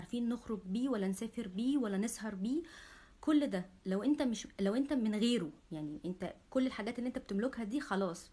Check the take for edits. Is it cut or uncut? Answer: cut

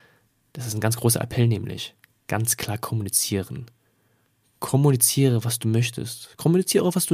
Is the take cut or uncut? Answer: uncut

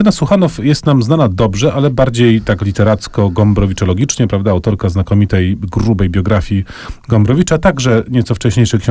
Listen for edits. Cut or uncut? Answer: uncut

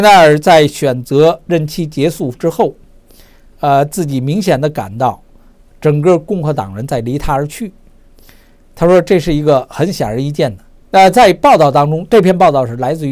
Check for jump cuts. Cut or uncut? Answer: cut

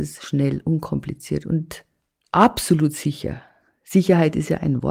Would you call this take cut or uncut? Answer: uncut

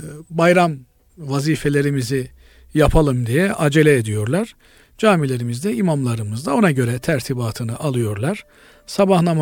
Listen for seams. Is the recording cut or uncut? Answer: uncut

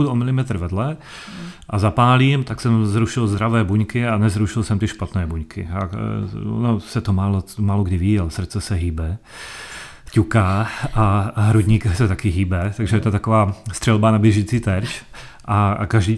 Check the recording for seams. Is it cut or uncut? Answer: uncut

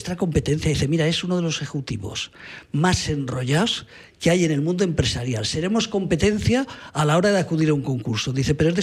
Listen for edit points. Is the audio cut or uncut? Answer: uncut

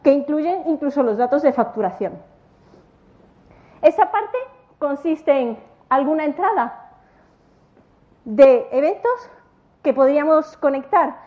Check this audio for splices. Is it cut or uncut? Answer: uncut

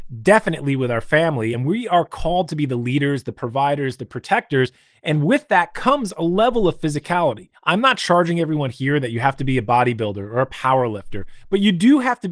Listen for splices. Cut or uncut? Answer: uncut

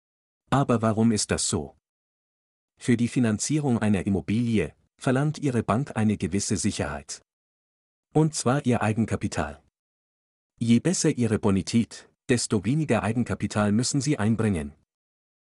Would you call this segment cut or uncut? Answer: uncut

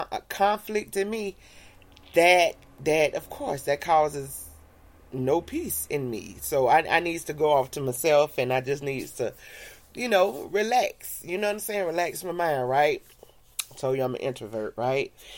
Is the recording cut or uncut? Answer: uncut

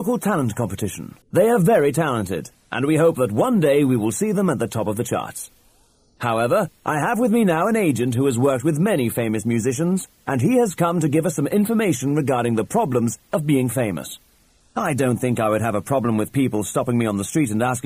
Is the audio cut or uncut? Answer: cut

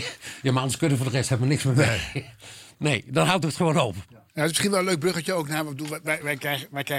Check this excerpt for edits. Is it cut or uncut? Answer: uncut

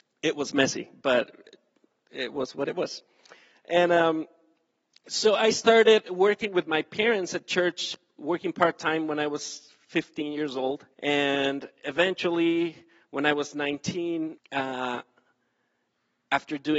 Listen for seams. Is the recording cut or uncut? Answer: cut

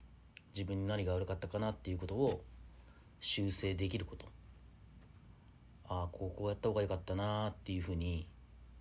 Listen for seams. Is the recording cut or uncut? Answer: uncut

